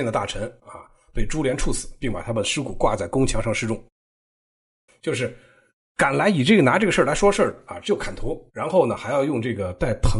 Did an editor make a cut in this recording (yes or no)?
yes